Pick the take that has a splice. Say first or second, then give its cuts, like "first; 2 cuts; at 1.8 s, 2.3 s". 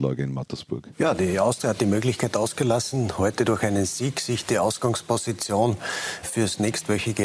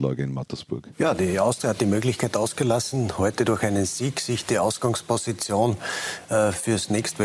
first; 1 cut; at 6.2 s